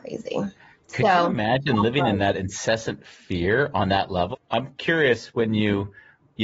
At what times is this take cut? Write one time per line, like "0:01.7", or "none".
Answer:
0:04.3